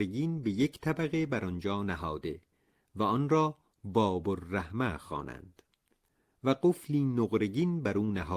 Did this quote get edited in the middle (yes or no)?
no